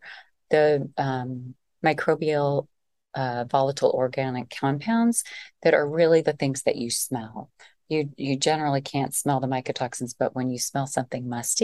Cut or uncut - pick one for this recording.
uncut